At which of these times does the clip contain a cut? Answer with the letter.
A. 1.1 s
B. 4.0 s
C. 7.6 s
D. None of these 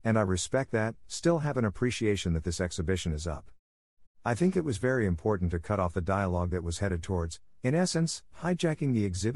B